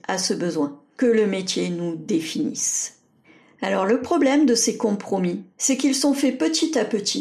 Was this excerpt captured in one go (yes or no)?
no